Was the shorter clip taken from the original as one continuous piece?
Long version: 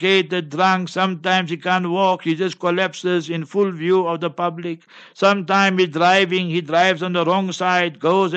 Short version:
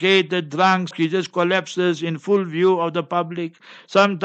no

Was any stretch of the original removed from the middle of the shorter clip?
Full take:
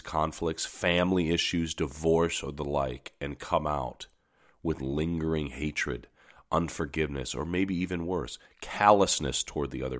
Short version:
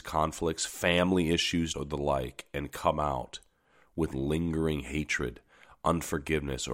yes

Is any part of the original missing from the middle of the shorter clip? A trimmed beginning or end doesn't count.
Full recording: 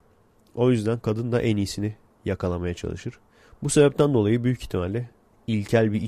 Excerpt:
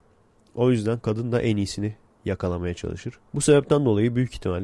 yes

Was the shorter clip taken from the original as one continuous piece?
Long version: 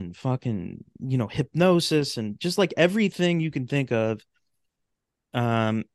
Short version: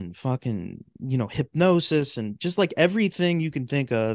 yes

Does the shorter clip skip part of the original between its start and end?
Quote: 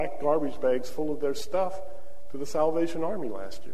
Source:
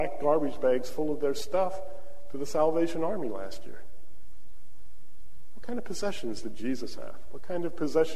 no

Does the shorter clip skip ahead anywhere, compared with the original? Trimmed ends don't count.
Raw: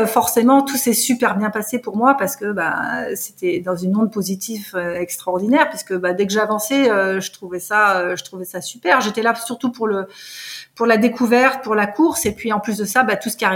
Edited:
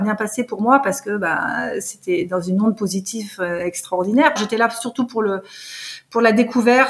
yes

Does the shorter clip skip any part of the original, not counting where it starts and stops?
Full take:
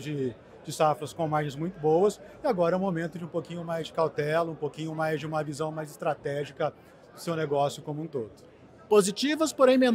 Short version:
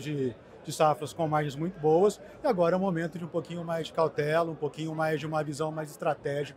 no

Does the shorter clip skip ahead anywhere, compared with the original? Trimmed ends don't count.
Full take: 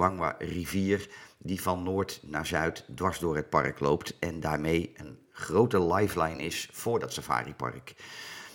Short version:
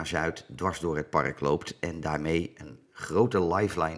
no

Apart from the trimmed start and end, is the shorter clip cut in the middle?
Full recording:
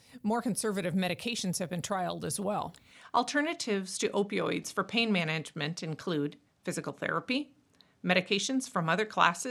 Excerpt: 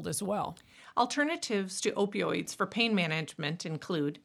no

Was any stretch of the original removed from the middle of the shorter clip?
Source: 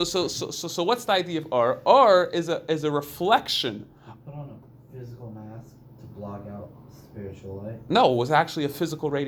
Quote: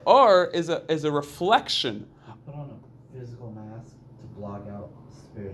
no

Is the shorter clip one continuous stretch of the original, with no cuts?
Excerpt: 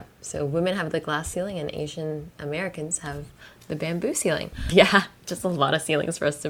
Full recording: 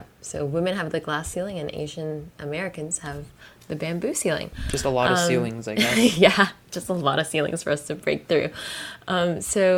no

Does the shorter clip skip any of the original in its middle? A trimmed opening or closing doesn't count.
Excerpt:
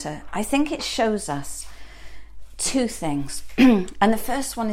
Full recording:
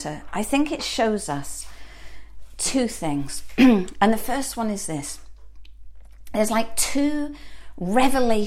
no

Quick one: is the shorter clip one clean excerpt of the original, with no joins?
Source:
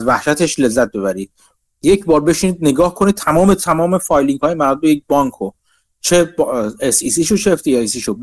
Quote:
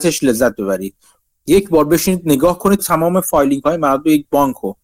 no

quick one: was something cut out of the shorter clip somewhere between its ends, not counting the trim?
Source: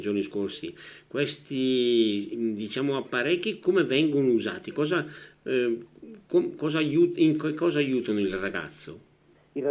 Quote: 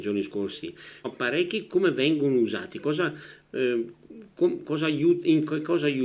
yes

